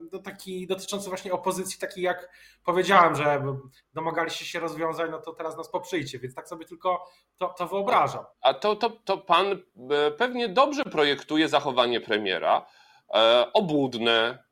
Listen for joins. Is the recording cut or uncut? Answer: cut